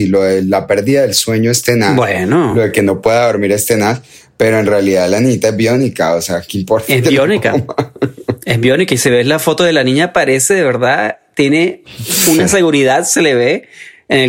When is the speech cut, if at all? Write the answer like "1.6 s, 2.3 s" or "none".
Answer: none